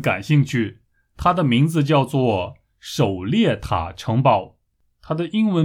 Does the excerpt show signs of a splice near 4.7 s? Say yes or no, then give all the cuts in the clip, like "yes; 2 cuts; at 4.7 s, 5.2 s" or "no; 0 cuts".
no; 0 cuts